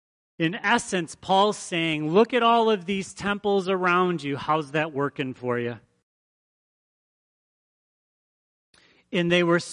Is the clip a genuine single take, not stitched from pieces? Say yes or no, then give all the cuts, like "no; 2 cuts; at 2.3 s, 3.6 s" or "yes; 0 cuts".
yes; 0 cuts